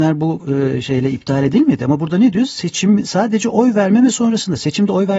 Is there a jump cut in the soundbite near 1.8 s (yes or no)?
no